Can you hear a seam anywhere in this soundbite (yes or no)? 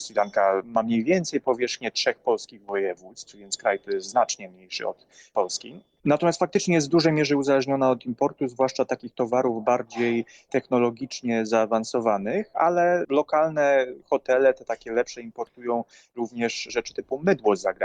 no